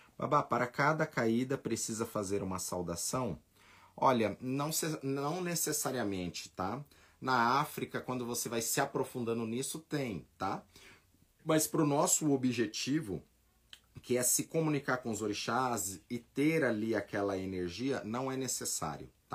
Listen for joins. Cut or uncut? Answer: uncut